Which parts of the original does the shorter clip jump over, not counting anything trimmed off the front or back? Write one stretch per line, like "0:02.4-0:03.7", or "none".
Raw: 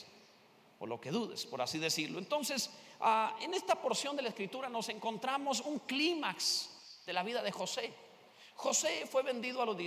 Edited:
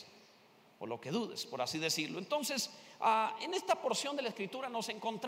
none